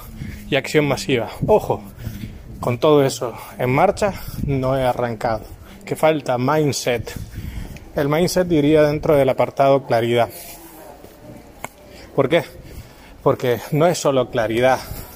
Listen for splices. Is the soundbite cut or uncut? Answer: uncut